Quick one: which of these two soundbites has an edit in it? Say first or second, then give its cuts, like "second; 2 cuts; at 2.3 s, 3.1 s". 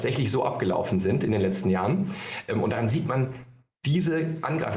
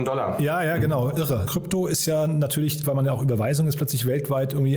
second; 2 cuts; at 1.5 s, 2.8 s